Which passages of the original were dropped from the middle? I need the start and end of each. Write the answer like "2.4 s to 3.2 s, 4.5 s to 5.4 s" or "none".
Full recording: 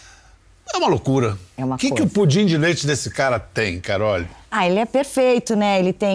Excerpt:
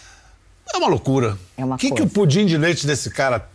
none